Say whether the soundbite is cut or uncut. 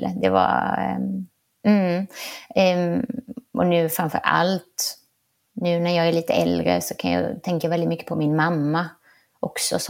uncut